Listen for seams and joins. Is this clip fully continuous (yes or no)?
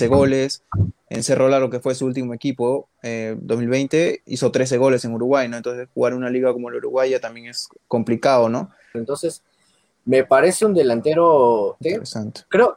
no